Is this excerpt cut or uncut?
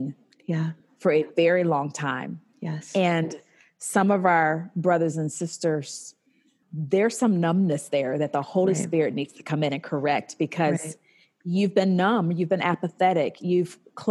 cut